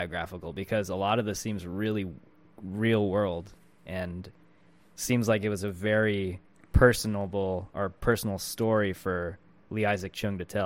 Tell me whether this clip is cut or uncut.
uncut